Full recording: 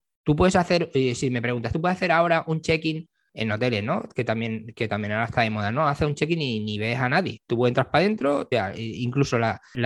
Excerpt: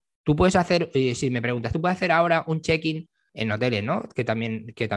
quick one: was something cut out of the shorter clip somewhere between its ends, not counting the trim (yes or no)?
no